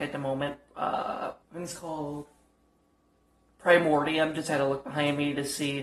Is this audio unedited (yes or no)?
no